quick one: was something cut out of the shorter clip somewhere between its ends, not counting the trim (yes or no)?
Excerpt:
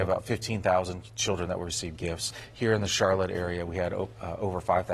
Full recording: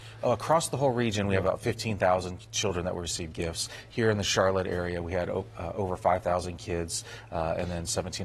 no